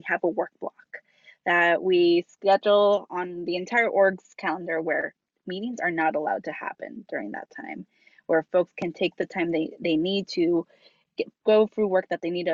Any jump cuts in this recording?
yes; 1 cut; at 11.3 s

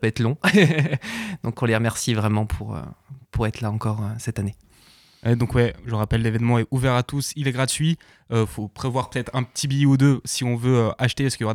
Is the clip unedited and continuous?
yes; 0 cuts

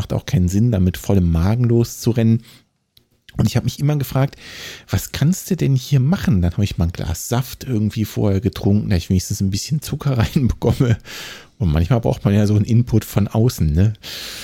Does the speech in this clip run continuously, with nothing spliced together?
yes; 0 cuts

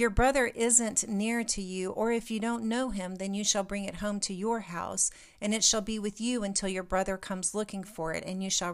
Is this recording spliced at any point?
no; 0 cuts

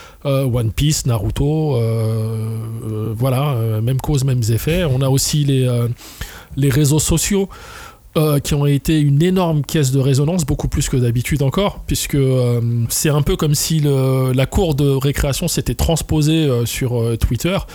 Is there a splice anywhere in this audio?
no; 0 cuts

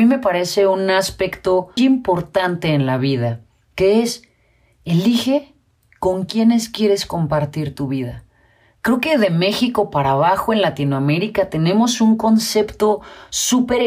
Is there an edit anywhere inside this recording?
yes; 1 cut; at 1.8 s

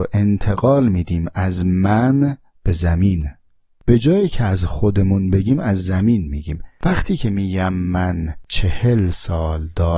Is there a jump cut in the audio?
no; 0 cuts

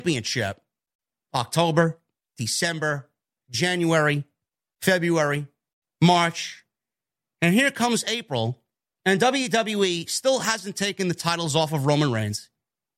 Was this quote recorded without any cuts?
no; 1 cut; at 2.2 s

